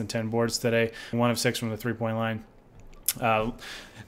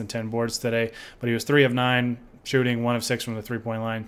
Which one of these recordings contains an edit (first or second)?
first